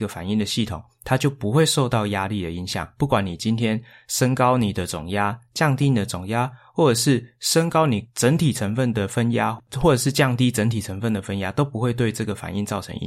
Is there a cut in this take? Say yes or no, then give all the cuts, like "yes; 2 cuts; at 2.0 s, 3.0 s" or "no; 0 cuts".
no; 0 cuts